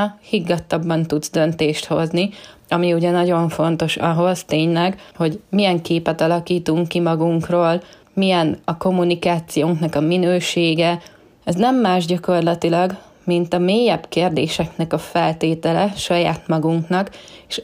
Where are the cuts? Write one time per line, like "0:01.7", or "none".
0:11.4